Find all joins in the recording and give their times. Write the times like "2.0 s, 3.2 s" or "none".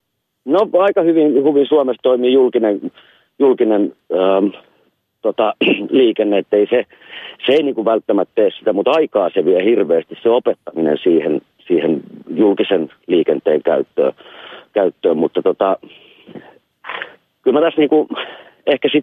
6.4 s